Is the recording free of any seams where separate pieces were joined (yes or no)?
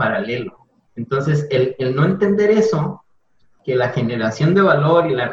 yes